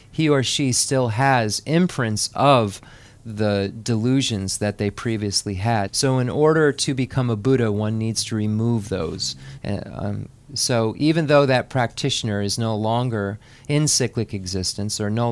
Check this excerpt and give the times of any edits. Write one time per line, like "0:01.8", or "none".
0:05.9
0:09.6